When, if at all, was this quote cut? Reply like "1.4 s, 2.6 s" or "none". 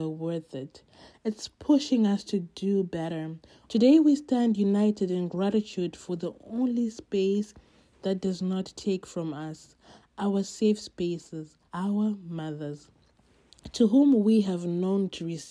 3.7 s, 11.7 s